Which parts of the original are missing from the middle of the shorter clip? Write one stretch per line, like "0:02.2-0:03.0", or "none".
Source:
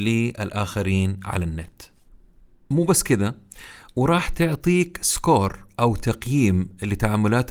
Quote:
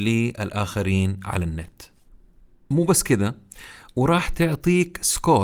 none